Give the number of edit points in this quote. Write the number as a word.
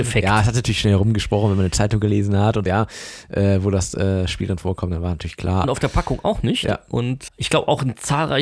three